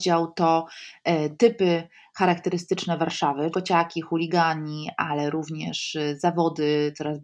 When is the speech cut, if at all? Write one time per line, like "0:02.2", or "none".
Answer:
0:03.5

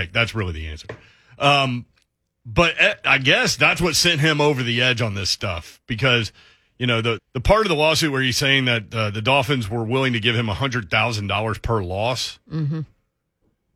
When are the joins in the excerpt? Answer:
0:07.2

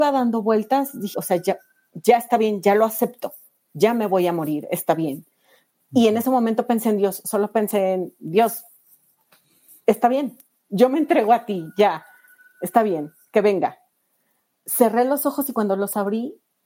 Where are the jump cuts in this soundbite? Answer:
0:01.1

